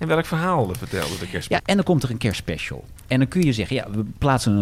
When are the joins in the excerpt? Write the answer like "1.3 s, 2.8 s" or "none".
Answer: 1.6 s